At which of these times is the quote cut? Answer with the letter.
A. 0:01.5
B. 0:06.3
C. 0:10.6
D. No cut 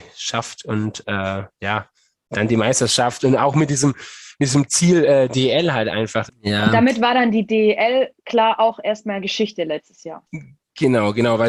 B